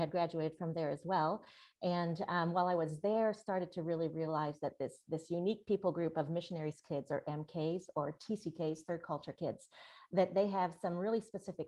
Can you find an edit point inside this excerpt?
no; 0 cuts

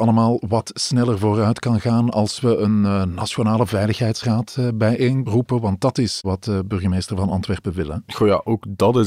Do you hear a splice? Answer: no; 0 cuts

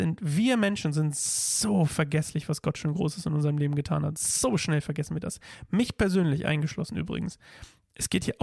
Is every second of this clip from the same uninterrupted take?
yes; 0 cuts

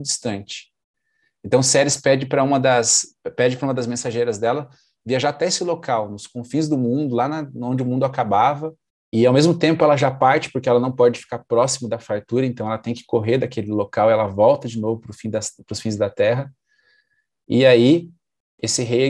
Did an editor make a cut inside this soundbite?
yes; 1 cut; at 9.0 s

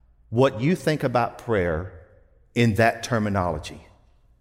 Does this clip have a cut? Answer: no; 0 cuts

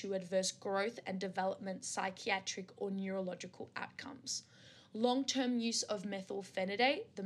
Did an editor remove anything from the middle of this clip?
no; 0 cuts

